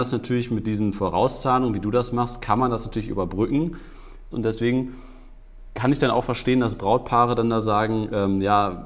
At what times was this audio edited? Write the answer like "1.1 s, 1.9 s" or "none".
4.3 s